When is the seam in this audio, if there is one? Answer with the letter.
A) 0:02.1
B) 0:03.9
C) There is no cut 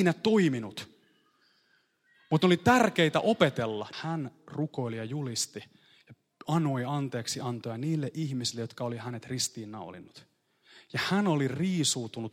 B